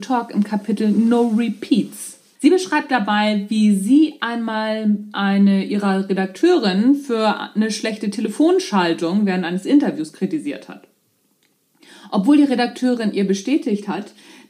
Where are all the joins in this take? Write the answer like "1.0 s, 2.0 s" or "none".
2.4 s